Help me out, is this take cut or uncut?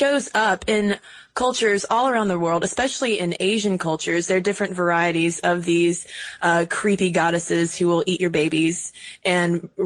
uncut